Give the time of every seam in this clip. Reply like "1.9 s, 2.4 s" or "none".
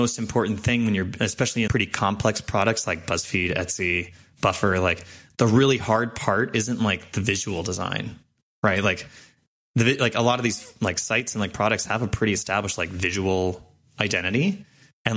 1.7 s

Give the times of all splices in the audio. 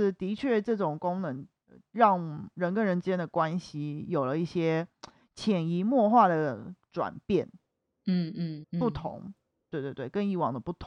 8.6 s

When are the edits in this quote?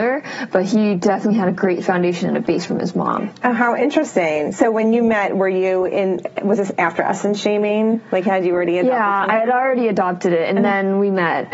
none

